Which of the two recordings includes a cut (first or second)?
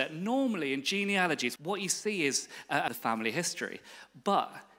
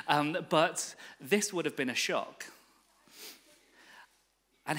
first